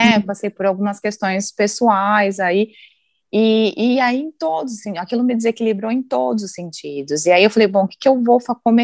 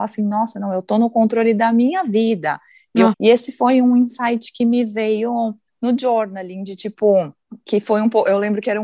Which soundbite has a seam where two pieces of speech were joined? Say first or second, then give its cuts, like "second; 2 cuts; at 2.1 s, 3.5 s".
second; 1 cut; at 3.1 s